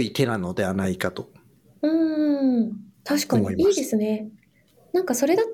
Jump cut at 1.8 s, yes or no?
no